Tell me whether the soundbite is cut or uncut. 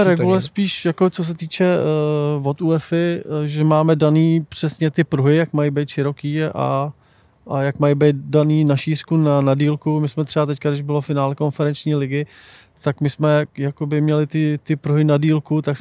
uncut